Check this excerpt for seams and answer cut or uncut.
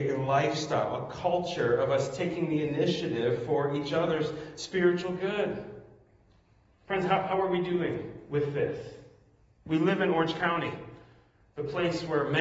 uncut